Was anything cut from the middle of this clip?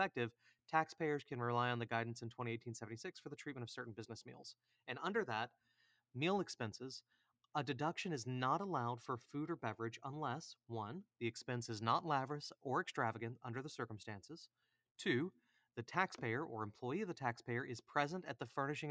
no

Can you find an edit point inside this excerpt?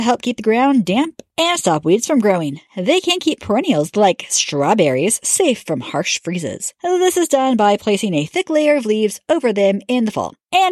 no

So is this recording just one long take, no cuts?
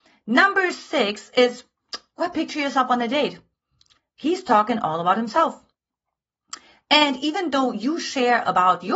yes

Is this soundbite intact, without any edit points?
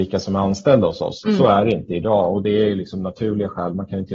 yes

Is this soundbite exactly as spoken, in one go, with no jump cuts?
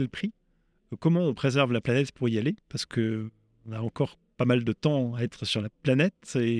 yes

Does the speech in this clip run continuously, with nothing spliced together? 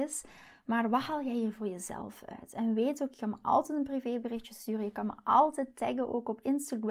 yes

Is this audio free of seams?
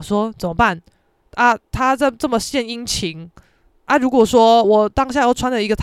no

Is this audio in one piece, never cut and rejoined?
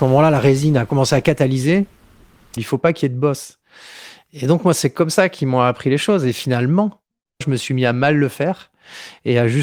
no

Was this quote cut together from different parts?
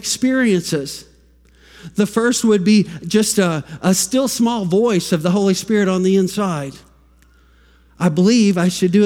no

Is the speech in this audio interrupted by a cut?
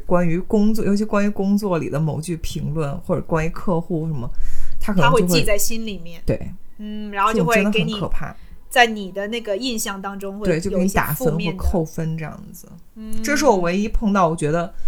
no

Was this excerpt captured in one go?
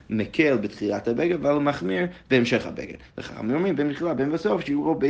yes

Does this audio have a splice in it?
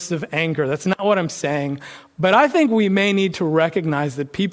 no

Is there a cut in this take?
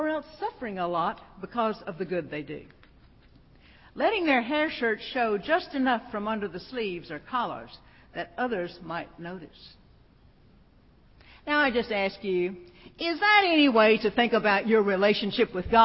no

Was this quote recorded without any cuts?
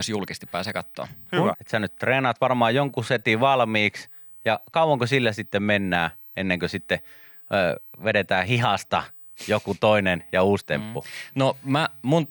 no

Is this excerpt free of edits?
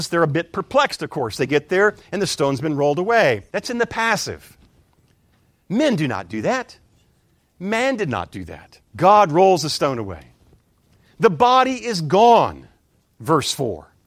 no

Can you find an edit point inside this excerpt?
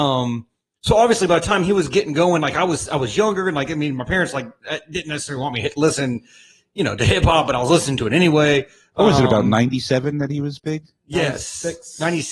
no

